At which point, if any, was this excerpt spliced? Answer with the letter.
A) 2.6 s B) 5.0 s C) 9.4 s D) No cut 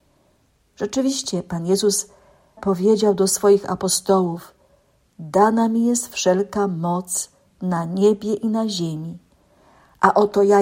A